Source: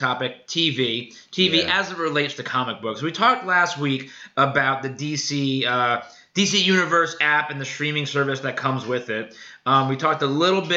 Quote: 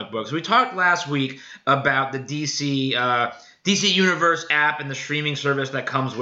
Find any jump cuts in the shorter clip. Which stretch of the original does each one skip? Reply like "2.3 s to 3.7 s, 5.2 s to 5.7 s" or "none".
none